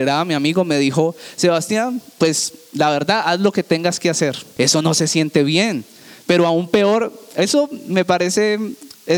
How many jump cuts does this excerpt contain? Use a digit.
1